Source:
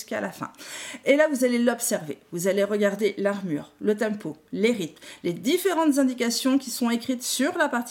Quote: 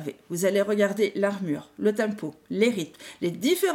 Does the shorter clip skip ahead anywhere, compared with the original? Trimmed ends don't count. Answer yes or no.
no